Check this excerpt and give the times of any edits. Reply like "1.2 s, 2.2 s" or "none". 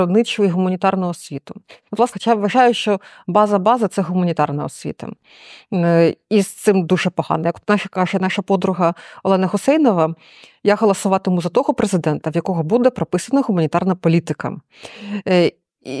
2.1 s